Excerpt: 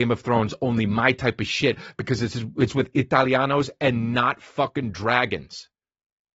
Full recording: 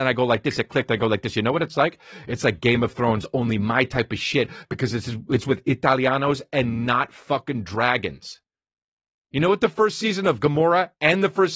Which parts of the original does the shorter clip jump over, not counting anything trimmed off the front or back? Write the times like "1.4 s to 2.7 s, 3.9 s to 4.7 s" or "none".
none